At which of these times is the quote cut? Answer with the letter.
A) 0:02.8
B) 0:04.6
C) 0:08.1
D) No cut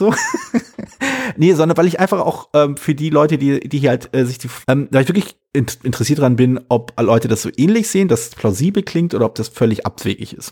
B